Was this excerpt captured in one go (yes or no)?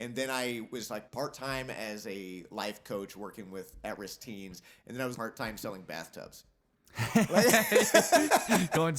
no